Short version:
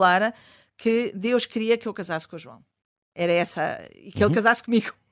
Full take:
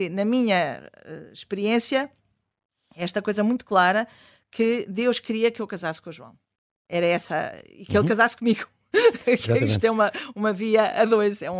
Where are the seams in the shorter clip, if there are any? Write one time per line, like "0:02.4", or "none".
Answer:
none